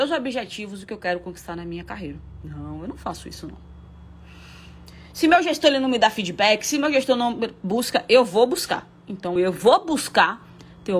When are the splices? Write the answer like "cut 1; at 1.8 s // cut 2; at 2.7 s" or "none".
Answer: cut 1; at 9.4 s